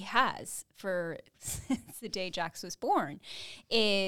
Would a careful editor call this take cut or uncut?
cut